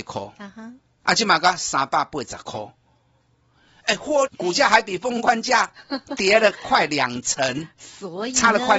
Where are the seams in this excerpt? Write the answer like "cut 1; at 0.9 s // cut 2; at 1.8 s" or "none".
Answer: cut 1; at 4.3 s